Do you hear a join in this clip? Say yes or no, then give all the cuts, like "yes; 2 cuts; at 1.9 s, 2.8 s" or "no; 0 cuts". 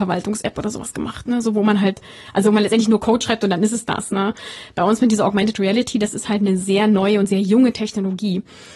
no; 0 cuts